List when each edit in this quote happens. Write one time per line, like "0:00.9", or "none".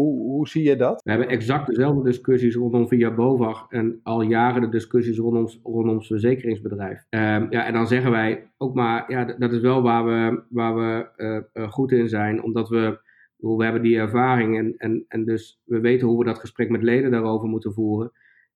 none